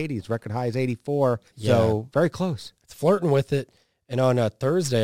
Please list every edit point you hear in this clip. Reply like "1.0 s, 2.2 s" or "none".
1.5 s